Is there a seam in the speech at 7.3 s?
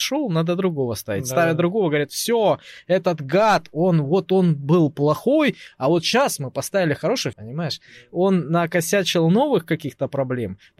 yes; 1 cut; at 7.3 s

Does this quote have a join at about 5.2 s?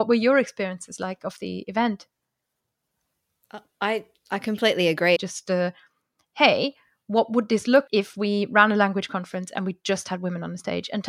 yes; 2 cuts; at 5.2 s, 7.9 s

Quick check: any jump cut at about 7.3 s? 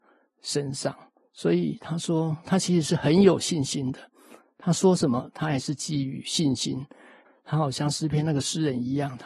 yes; 1 cut; at 7.3 s

